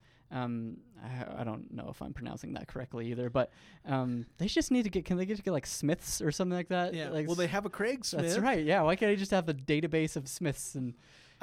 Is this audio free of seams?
yes; 0 cuts

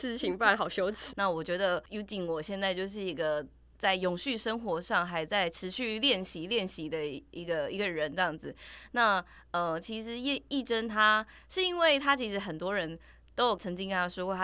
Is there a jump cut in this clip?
yes; 1 cut; at 1.1 s

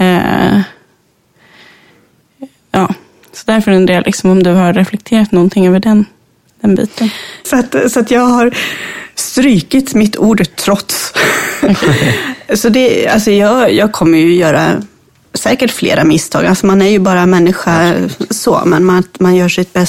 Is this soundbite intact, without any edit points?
no; 1 cut; at 7.4 s

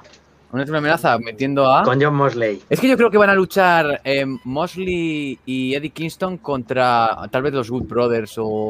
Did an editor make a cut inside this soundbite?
yes; 1 cut; at 2.7 s

